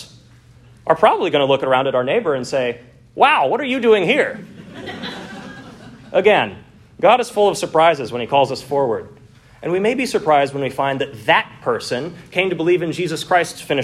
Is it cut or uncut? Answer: uncut